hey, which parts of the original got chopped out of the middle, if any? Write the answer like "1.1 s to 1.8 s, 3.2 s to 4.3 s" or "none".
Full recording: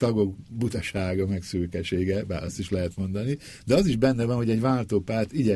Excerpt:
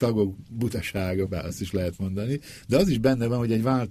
1.3 s to 2.2 s